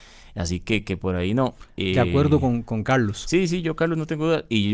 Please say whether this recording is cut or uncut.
uncut